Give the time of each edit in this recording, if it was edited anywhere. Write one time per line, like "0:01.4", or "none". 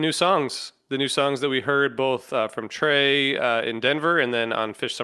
none